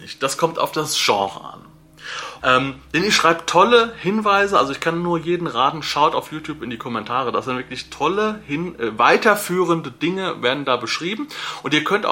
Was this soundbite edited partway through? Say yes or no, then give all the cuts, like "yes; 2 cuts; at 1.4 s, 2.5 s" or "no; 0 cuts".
yes; 1 cut; at 2.4 s